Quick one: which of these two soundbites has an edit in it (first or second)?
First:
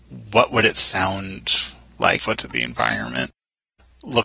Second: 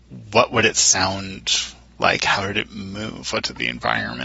first